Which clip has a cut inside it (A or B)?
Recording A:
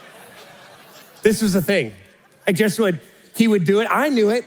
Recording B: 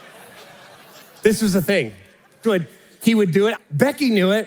B